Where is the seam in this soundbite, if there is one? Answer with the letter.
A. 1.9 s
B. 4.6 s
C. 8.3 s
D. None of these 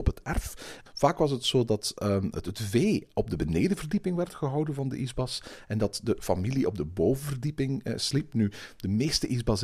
D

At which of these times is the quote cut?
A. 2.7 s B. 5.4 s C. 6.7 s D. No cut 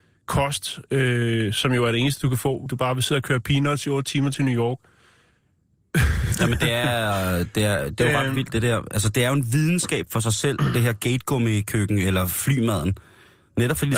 A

